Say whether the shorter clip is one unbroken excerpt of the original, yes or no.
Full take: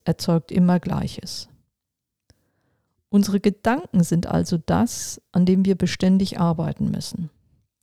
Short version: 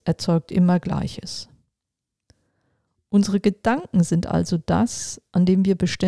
yes